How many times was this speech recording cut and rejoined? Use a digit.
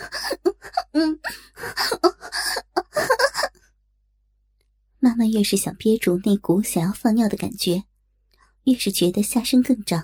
0